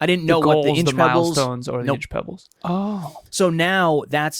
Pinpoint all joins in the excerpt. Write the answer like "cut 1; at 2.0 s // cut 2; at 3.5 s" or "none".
cut 1; at 2.6 s